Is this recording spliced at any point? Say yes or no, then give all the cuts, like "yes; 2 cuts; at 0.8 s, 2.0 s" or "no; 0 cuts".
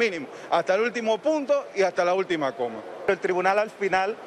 no; 0 cuts